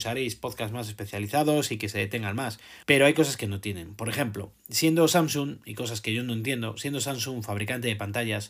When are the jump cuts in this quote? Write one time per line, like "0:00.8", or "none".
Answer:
0:02.8